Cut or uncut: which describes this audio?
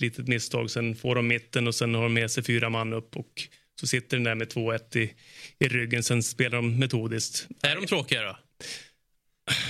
uncut